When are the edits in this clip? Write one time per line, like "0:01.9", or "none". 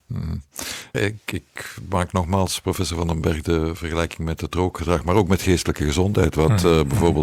0:00.9